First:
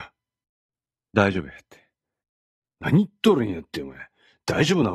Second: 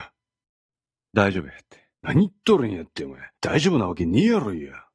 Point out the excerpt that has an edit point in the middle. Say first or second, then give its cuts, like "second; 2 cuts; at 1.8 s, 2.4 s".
second; 2 cuts; at 1.9 s, 3.4 s